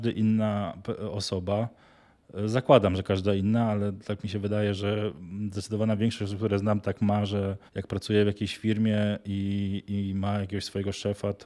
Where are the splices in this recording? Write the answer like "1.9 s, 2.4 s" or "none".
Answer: 7.7 s